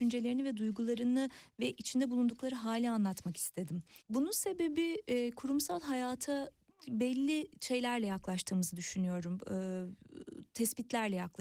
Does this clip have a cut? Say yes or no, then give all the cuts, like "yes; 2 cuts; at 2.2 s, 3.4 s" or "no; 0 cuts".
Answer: yes; 1 cut; at 4.0 s